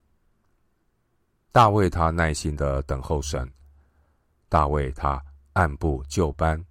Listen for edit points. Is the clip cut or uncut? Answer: uncut